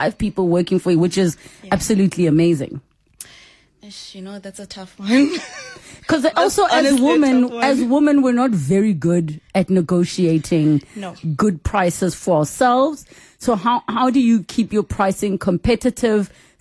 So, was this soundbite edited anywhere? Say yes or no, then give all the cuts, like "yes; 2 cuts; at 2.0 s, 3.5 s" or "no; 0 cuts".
no; 0 cuts